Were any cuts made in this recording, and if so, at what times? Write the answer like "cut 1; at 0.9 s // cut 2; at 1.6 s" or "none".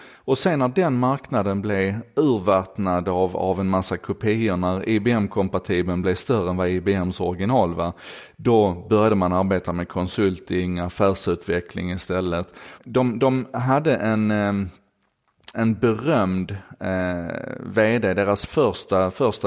cut 1; at 12.8 s // cut 2; at 15.5 s